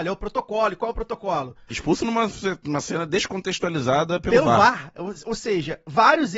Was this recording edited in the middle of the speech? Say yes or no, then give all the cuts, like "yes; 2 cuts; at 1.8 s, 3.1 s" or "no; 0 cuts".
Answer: yes; 1 cut; at 1.7 s